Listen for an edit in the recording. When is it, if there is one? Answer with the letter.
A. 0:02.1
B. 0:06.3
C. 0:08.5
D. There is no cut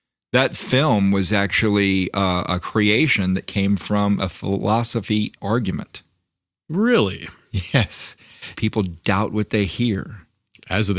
C